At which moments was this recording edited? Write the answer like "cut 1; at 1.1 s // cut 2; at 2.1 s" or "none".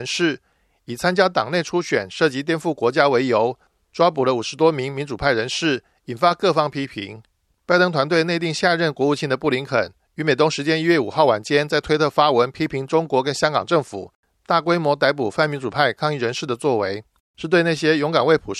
none